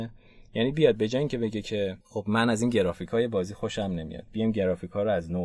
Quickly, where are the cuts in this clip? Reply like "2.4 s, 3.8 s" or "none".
2.0 s